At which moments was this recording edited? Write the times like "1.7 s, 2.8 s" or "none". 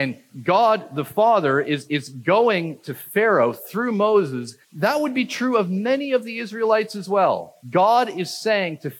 4.6 s, 7.6 s